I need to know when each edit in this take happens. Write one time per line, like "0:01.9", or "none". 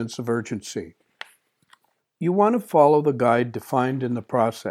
0:02.0